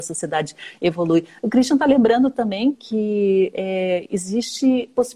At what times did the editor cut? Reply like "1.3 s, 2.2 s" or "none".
2.7 s

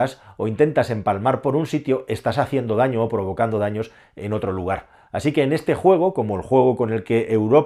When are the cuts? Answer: none

